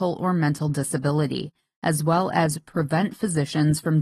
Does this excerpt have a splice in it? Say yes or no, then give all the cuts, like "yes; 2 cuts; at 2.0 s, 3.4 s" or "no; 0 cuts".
no; 0 cuts